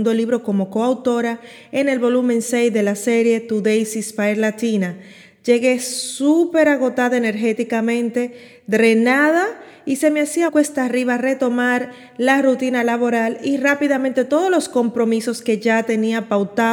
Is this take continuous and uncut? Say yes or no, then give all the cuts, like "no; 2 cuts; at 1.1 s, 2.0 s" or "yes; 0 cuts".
no; 1 cut; at 10.5 s